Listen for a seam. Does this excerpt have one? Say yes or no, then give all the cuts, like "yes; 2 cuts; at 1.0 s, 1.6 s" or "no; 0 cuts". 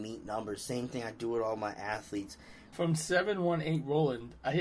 yes; 1 cut; at 2.7 s